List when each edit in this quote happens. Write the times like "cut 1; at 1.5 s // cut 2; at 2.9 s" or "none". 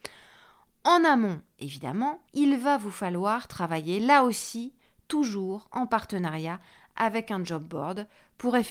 cut 1; at 2.3 s

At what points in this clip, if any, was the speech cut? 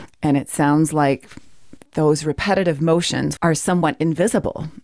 cut 1; at 3.4 s

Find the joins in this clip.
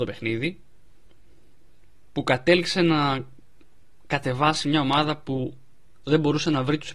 none

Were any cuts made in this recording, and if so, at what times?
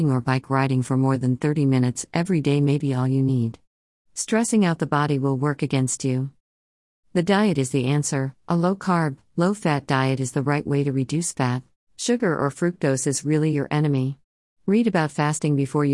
cut 1; at 11.8 s // cut 2; at 14.6 s

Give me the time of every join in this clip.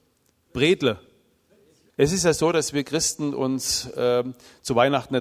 cut 1; at 1.9 s

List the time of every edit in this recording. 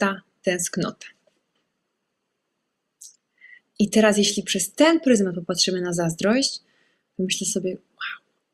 cut 1; at 3.6 s

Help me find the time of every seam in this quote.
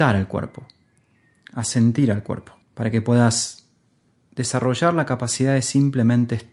cut 1; at 2.6 s

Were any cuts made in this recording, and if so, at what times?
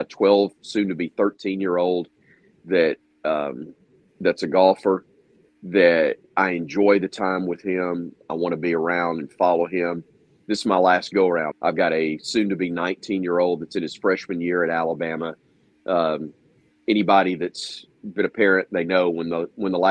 cut 1; at 11.5 s

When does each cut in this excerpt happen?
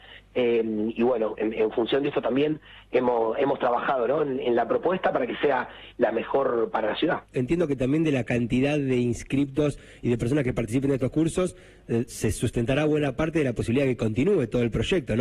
cut 1; at 7.3 s // cut 2; at 12.1 s

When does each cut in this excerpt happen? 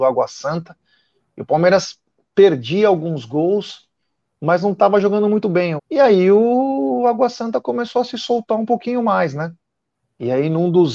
cut 1; at 5.8 s

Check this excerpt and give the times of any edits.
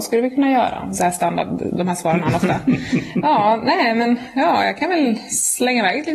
none

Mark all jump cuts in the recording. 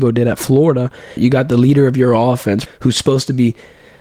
cut 1; at 1.2 s // cut 2; at 2.7 s

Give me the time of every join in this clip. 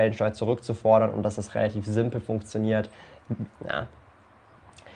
cut 1; at 3.5 s

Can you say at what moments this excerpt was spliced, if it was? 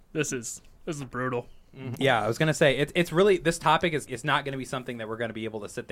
cut 1; at 2.0 s // cut 2; at 4.1 s

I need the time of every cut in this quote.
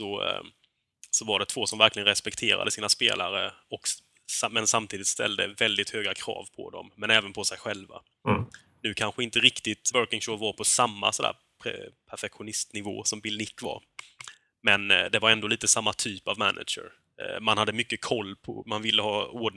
cut 1; at 9.9 s

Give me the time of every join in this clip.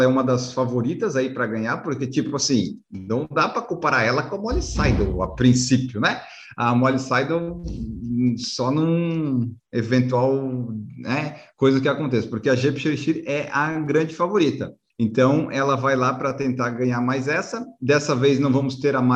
none

